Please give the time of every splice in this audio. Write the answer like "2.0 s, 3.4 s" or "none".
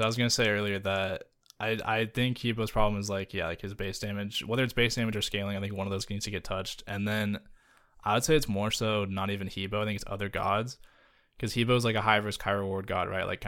none